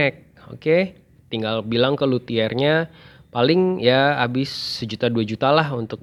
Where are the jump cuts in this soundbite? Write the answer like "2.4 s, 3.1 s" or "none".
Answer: 1.2 s